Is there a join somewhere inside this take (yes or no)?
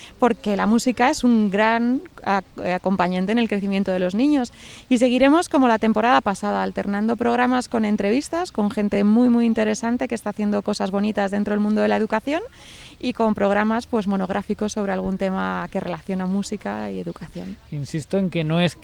no